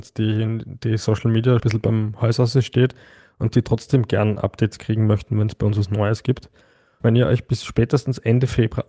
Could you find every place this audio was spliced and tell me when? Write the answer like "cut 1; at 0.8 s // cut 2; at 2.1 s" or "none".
cut 1; at 1.6 s // cut 2; at 7.0 s